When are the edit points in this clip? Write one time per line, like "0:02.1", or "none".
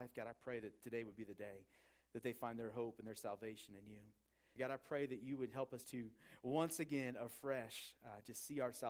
0:04.6
0:05.8